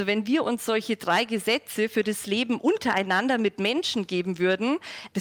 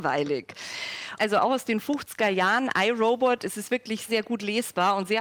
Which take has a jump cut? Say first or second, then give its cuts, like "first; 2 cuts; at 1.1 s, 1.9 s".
second; 2 cuts; at 1.2 s, 4.1 s